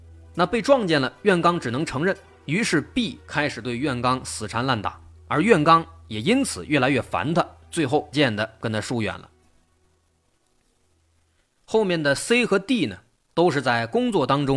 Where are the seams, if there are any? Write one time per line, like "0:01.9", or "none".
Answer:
0:08.1
0:13.3